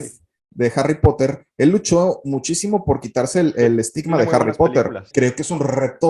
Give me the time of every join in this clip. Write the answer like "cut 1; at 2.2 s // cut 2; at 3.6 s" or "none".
cut 1; at 5.1 s